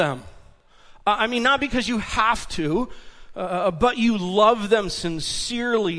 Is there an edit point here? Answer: no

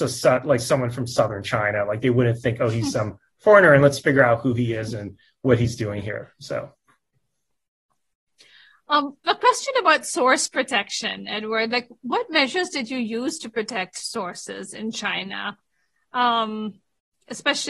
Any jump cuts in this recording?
no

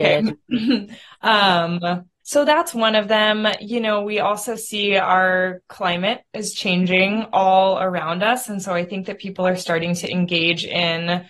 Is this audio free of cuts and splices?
no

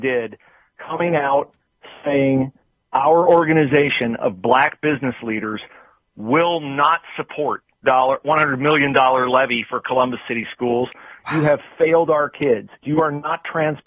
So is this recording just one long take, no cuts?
no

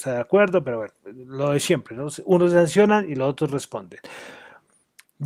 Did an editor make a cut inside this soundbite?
no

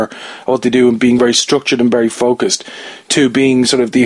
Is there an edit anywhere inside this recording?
no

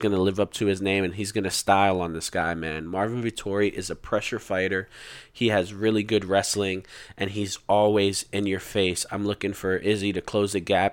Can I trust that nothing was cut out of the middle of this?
yes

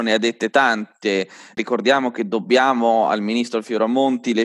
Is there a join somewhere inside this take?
no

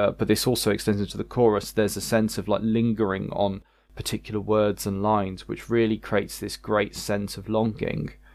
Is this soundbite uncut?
yes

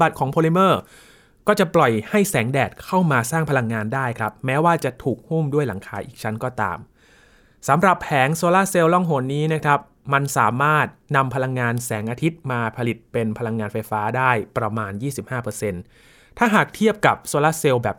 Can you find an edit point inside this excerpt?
no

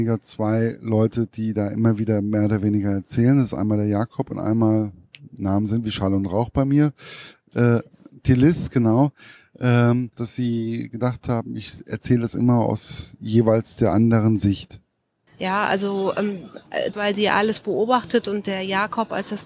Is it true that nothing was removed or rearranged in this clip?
no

